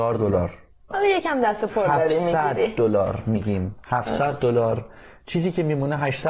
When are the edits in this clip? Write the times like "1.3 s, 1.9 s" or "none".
0.9 s